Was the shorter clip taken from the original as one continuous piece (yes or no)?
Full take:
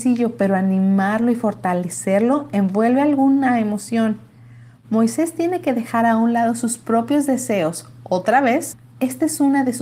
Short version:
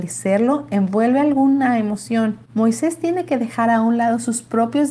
no